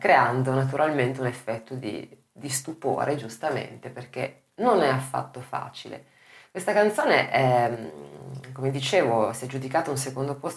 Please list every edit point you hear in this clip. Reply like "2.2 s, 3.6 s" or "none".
none